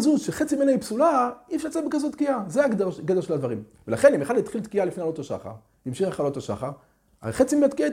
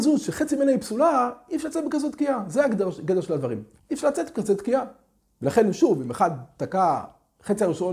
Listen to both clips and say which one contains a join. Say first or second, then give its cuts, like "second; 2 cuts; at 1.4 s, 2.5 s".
second; 1 cut; at 3.8 s